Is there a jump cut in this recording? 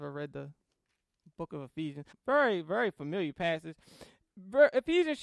yes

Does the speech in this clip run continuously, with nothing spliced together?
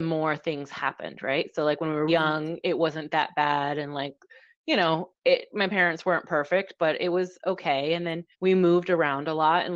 no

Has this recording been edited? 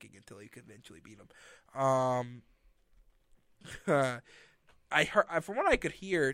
no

